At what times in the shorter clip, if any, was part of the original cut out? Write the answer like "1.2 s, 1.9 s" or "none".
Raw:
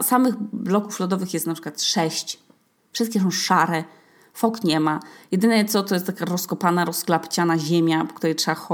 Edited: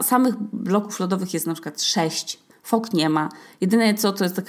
2.5 s